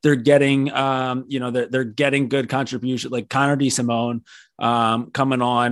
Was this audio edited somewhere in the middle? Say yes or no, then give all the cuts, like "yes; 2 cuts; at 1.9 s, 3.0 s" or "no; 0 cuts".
no; 0 cuts